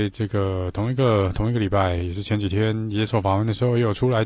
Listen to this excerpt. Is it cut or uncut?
uncut